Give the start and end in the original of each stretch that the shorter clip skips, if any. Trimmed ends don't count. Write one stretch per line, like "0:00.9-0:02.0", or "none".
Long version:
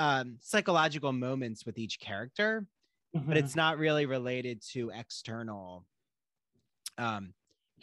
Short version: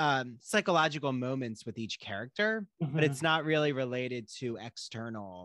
0:02.7-0:03.1